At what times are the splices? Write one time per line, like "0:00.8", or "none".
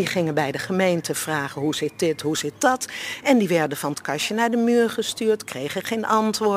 none